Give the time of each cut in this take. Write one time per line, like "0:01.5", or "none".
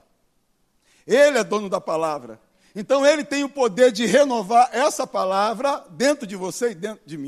none

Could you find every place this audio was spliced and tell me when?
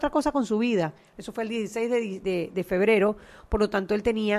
0:01.1

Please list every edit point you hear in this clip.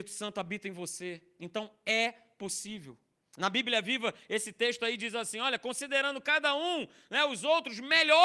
none

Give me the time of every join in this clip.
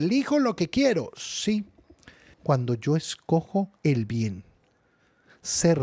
0:02.3
0:03.8

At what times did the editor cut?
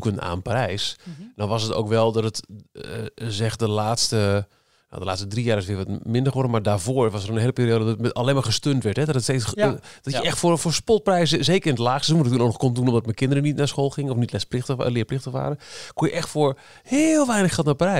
none

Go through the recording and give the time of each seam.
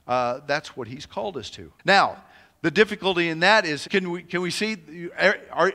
0:01.8
0:03.9

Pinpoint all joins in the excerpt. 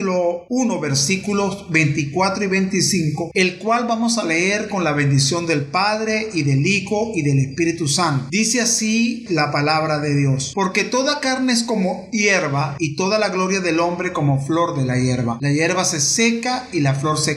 0:09.3

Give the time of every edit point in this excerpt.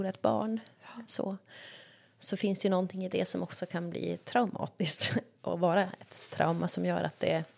none

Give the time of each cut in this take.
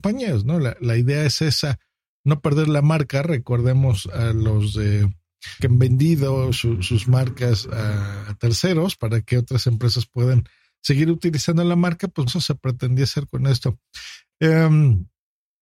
0:05.6
0:12.3

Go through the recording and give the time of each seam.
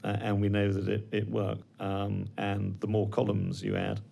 0:01.6

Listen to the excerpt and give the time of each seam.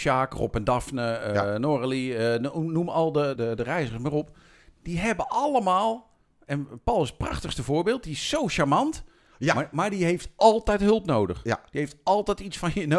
0:03.4

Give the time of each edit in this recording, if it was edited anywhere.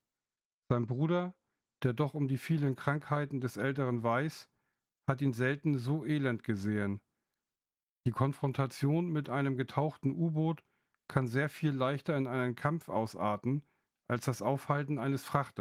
none

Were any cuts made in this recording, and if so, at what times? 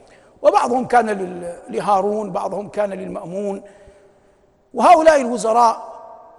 none

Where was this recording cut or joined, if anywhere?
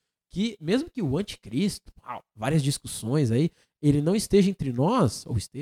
none

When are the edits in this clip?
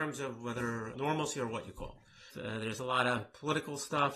0:00.9
0:02.3

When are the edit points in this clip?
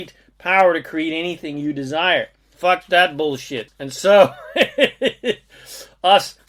0:02.5
0:03.7

